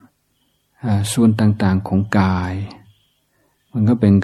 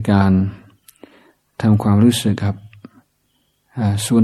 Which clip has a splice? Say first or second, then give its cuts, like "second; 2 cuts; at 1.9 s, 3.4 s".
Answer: second; 1 cut; at 2.4 s